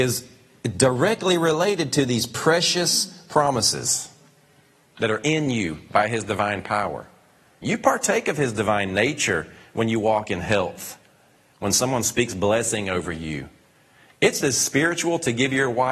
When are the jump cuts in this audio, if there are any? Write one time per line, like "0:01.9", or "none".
0:14.4

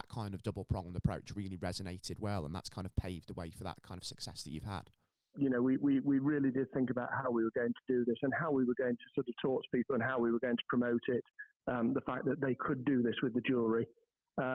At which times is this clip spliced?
0:05.3

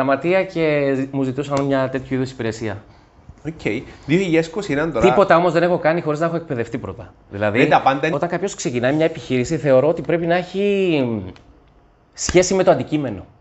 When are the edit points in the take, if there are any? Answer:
0:08.1

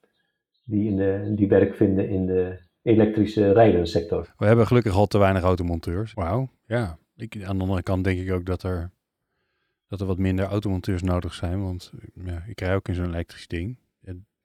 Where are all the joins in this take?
0:04.2
0:06.1

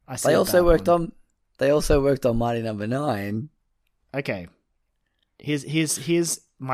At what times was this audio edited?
none

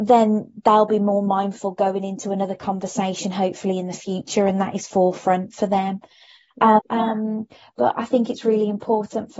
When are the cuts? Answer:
0:06.8

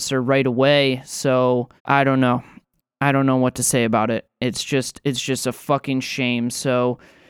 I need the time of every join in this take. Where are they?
0:01.8

